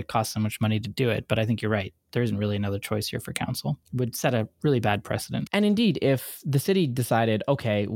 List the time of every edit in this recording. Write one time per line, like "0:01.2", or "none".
none